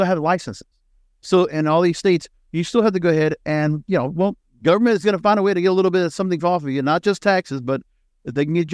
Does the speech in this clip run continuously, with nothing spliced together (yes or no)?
yes